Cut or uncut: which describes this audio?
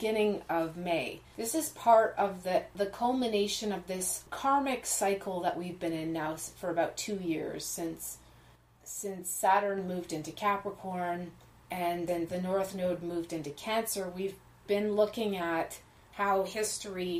uncut